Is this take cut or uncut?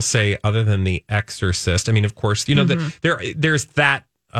cut